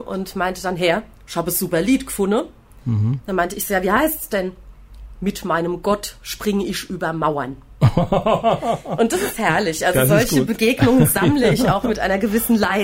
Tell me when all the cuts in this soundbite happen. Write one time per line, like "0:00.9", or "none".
none